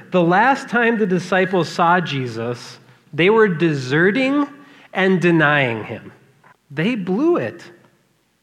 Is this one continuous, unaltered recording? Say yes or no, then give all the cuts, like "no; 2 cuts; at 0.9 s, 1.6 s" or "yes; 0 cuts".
no; 1 cut; at 6.5 s